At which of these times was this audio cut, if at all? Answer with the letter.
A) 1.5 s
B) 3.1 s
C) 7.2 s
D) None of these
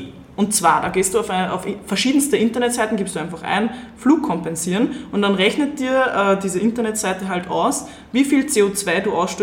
D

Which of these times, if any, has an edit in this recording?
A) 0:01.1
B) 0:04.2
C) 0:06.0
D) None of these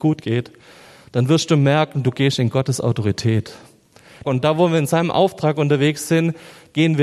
B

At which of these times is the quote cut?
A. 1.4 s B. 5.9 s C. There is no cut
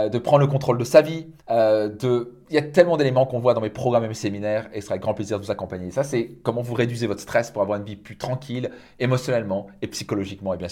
A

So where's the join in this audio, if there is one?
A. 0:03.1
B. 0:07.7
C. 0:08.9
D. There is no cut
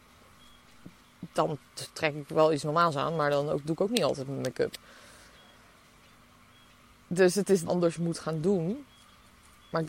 B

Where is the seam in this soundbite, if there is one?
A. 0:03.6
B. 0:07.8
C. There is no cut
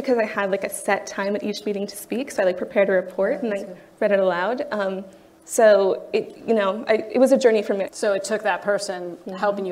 B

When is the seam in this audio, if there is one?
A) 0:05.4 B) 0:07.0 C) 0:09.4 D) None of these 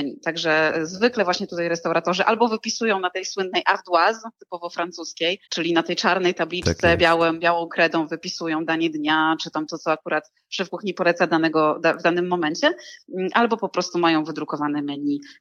A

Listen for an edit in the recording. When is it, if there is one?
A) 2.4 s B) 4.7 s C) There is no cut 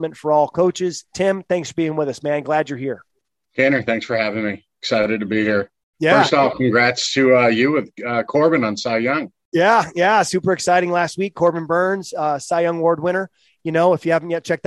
C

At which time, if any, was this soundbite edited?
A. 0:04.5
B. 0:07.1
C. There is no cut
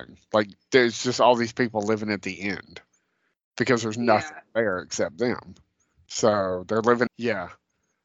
B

